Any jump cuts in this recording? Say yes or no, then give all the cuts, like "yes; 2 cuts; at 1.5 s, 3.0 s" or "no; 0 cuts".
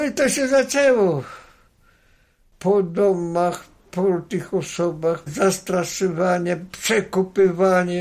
yes; 1 cut; at 5.3 s